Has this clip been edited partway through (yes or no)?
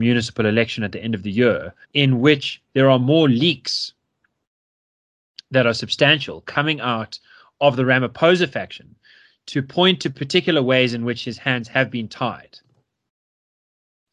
yes